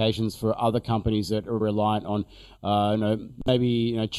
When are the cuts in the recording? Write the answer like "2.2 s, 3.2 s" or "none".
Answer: 1.6 s